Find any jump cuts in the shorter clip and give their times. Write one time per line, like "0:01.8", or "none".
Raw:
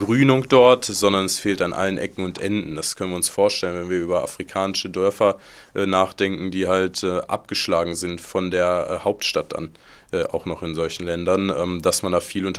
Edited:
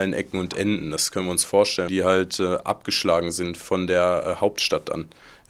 0:01.9